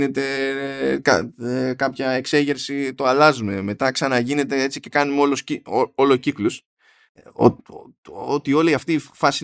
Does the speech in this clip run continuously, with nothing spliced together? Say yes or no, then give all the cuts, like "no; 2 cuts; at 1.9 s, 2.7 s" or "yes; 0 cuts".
yes; 0 cuts